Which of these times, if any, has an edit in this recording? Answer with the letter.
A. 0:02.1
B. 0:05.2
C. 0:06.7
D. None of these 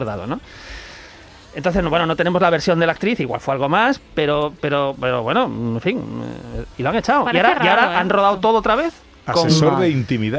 C